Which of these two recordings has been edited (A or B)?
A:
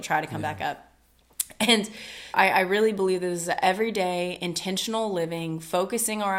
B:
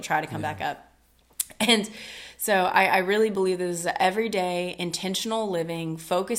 A